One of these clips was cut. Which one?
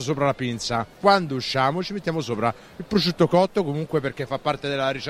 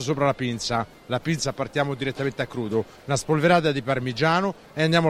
first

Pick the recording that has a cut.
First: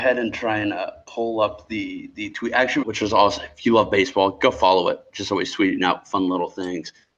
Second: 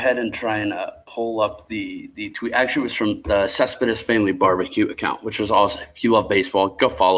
first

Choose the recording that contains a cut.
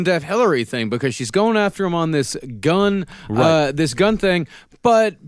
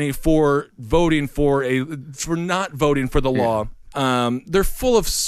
second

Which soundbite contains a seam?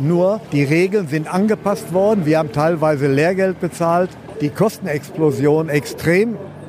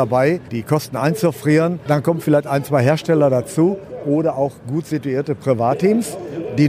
first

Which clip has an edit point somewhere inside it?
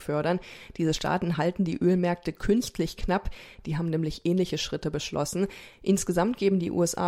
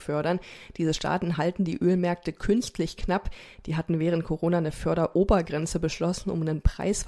first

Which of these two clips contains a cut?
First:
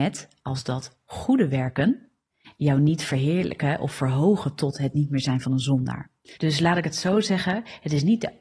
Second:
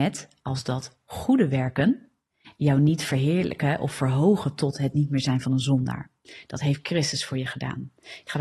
first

